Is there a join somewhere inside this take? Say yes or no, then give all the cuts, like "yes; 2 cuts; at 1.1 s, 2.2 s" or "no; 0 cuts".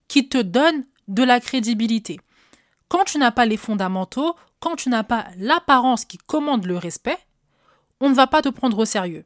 no; 0 cuts